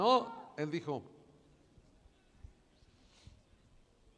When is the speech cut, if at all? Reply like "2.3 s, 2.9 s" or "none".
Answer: none